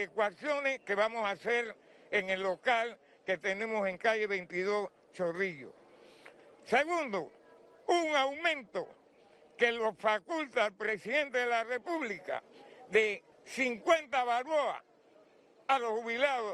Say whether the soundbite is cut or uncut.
cut